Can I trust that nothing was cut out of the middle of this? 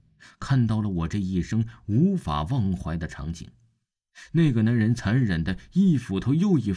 yes; 0 cuts

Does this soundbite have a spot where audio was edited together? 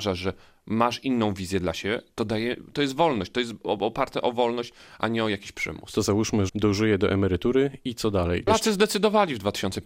yes; 2 cuts; at 6.5 s, 8.5 s

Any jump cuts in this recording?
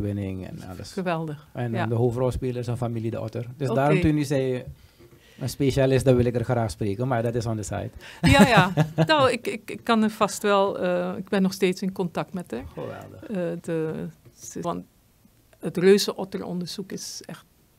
yes; 2 cuts; at 13.6 s, 14.6 s

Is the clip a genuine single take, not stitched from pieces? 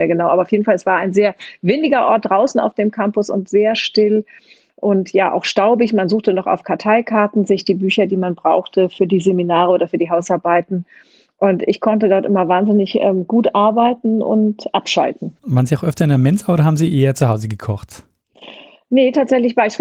no; 1 cut; at 15.4 s

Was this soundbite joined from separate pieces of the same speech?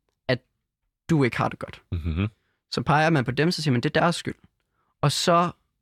no; 0 cuts

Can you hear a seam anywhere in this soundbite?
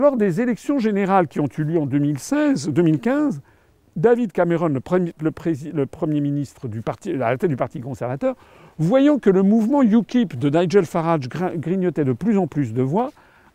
no; 0 cuts

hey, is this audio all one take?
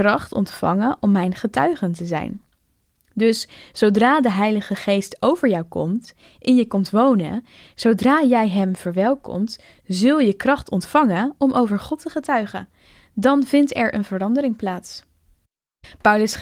yes; 0 cuts

